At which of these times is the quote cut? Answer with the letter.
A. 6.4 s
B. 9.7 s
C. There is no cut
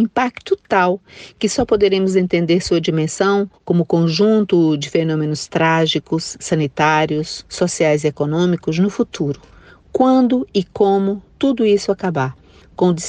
C